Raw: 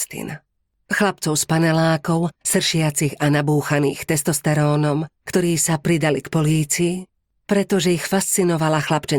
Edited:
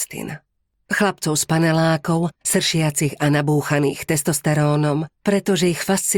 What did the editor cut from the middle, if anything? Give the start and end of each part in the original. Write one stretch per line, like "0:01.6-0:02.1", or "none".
0:05.2-0:07.4